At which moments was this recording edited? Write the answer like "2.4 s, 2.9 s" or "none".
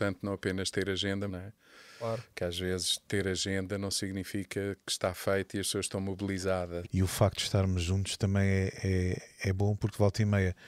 1.3 s, 6.8 s